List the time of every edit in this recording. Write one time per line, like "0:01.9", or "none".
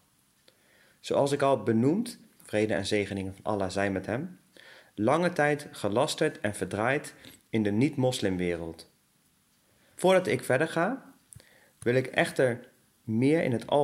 0:02.4
0:09.9